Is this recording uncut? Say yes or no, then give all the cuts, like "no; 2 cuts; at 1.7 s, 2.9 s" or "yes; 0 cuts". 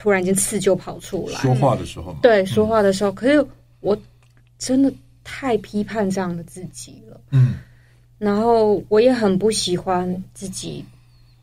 yes; 0 cuts